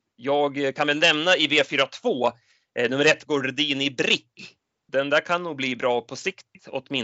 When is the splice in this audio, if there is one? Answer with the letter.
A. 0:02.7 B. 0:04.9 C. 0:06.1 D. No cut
B